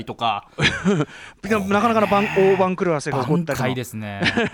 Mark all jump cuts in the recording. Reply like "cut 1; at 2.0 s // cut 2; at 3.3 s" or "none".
cut 1; at 3.6 s